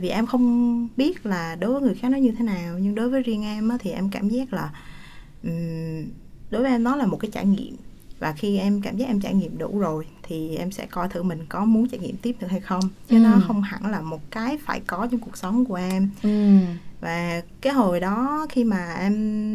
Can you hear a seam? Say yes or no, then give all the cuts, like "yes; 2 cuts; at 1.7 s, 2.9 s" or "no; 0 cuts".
no; 0 cuts